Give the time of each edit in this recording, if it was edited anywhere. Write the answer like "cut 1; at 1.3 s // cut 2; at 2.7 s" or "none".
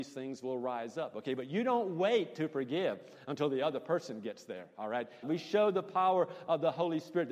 cut 1; at 5.2 s